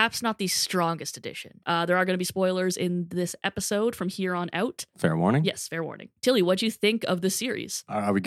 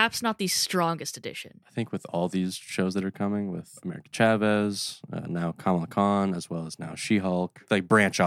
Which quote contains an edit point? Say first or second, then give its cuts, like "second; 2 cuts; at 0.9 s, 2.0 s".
first; 1 cut; at 1.6 s